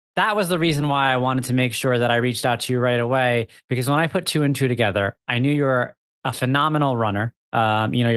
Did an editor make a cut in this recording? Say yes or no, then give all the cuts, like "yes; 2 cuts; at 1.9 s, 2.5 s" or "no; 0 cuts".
no; 0 cuts